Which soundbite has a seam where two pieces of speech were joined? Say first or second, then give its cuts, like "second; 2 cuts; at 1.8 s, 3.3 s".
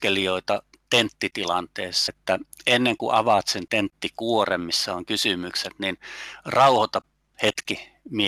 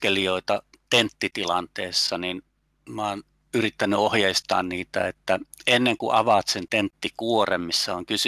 first; 1 cut; at 2.1 s